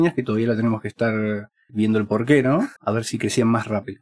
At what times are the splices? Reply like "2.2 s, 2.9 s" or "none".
1.7 s, 2.8 s